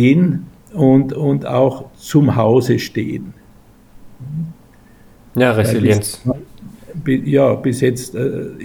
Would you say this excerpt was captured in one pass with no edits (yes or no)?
yes